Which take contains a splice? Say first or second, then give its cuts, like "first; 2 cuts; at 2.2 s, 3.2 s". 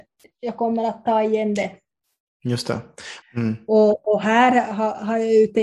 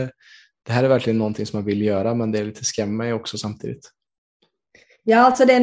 first; 1 cut; at 3.2 s